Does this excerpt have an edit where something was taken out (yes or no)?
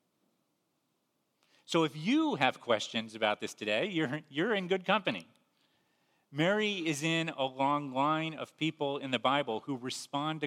no